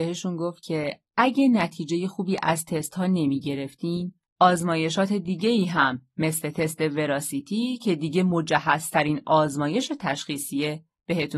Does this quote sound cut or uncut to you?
uncut